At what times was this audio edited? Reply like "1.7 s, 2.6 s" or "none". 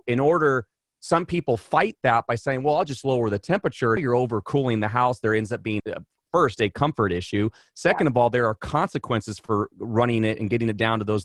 4.0 s, 5.8 s

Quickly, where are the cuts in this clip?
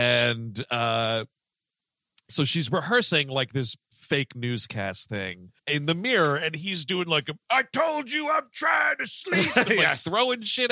5.6 s

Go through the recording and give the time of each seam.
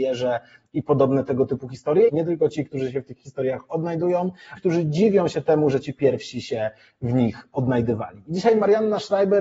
2.1 s, 4.6 s

